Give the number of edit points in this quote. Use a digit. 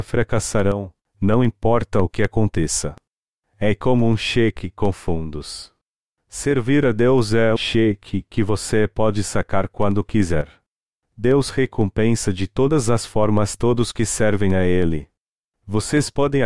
1